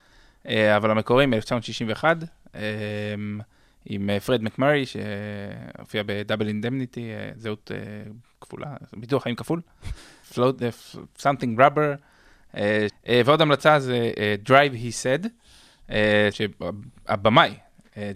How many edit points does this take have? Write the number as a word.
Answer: three